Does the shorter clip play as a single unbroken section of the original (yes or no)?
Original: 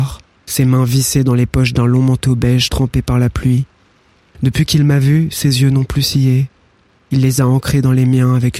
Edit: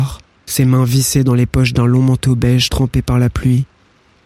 yes